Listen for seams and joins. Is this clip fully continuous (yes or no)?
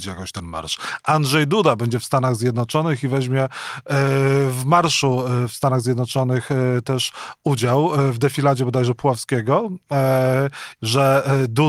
no